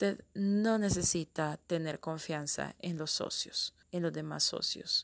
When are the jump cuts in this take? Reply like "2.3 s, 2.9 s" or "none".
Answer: 3.8 s

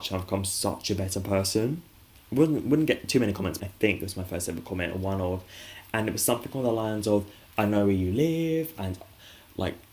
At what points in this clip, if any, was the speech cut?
2.1 s, 3.6 s

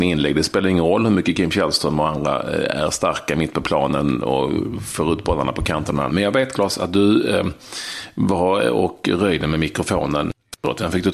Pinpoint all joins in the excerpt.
6.1 s

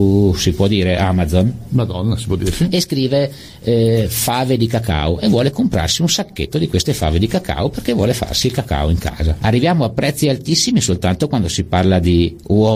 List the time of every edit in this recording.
9.4 s

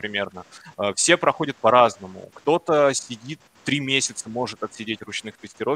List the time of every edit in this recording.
none

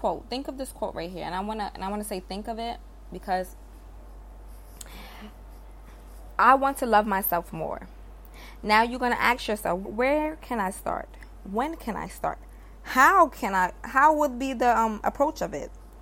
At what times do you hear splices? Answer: 9.8 s

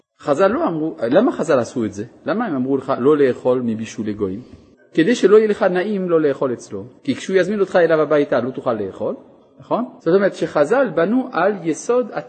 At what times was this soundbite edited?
7.0 s, 10.0 s

